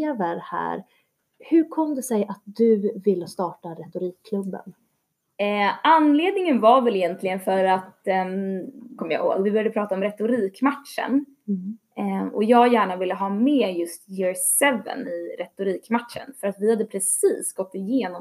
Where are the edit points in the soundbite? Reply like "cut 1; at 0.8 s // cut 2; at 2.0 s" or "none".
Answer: cut 1; at 9.0 s